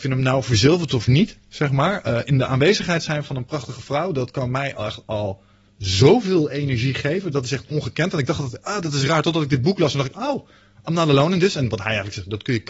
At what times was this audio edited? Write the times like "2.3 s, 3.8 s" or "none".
none